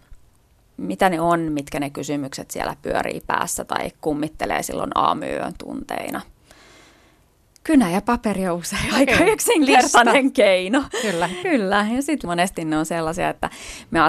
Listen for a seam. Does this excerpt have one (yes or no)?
yes